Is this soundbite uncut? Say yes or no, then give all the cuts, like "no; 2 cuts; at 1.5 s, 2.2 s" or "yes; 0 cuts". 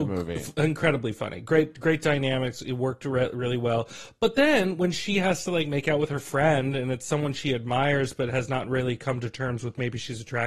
yes; 0 cuts